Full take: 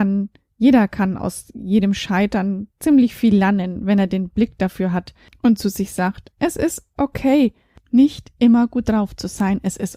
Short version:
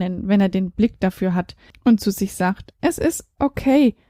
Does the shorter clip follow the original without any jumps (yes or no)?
yes